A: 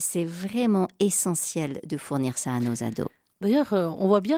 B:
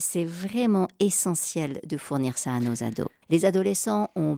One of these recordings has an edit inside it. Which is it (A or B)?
B